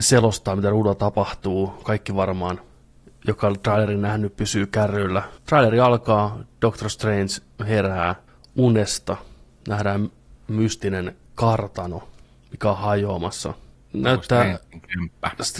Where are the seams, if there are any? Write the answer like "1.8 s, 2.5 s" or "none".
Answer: none